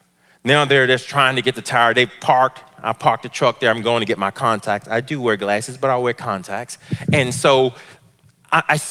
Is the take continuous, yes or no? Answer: yes